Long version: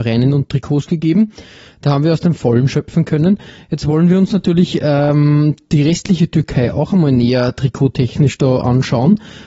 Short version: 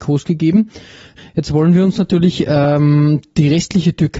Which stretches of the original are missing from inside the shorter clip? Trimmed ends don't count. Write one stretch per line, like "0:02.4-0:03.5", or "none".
0:01.8-0:03.5